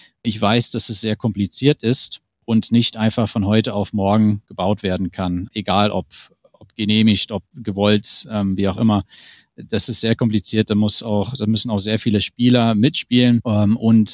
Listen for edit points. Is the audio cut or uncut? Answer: uncut